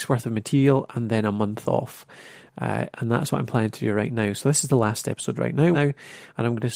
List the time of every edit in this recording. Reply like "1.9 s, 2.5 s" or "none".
5.7 s